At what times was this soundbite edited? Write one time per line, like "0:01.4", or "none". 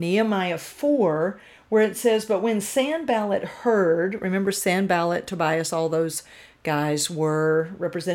none